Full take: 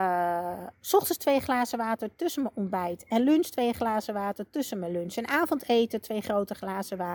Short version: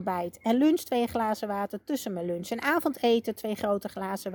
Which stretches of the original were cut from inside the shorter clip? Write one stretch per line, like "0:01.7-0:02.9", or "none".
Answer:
none